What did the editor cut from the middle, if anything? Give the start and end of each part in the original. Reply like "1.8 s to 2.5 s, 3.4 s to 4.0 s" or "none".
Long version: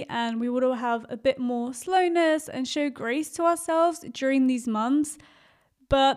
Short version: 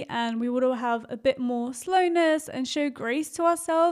none